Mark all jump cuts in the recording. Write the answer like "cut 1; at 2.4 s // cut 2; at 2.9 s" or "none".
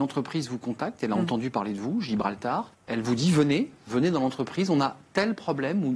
cut 1; at 2.7 s